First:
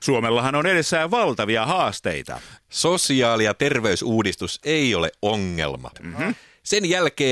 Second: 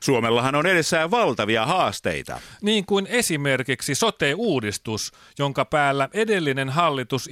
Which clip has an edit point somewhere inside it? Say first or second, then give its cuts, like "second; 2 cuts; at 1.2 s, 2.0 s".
first; 2 cuts; at 2.6 s, 5.9 s